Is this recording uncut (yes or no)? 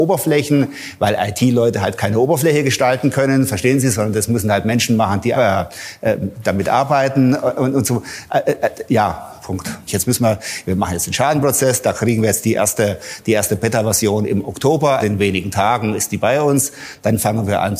no